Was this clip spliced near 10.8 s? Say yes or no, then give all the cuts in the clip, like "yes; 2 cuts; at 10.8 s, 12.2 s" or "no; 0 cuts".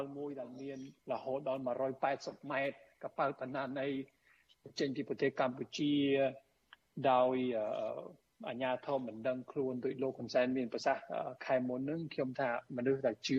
no; 1 cut; at 1.0 s